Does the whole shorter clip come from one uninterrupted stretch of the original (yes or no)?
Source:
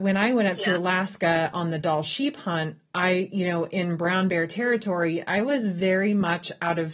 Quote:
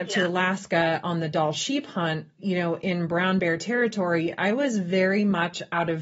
no